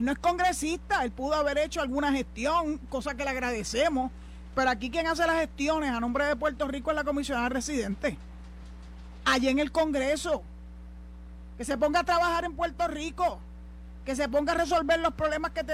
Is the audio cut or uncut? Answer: uncut